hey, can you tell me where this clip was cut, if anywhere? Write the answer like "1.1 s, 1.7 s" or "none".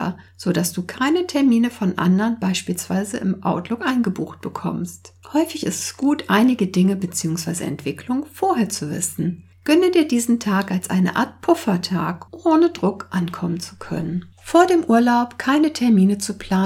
5.2 s, 12.3 s, 14.3 s